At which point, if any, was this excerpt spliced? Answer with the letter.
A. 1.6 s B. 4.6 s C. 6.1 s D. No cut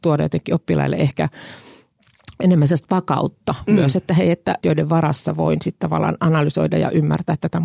B